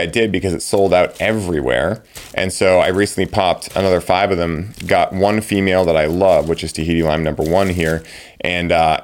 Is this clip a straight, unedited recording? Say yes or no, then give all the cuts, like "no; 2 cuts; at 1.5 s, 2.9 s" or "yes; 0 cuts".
yes; 0 cuts